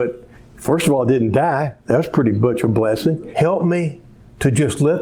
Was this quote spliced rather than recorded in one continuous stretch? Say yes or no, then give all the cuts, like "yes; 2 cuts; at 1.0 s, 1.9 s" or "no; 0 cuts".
yes; 1 cut; at 3.3 s